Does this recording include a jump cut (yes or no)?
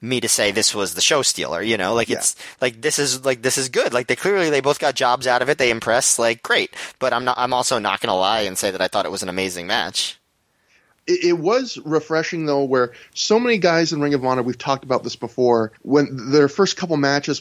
yes